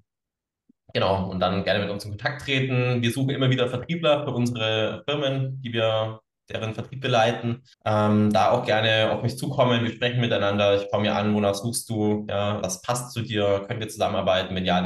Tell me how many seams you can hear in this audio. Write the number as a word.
two